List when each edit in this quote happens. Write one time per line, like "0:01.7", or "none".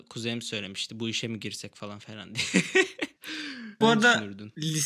0:03.8